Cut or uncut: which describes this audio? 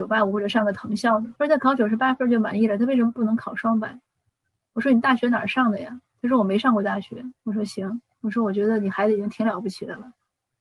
cut